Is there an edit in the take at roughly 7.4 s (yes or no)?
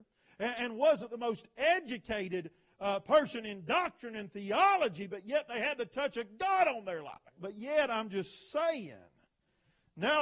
yes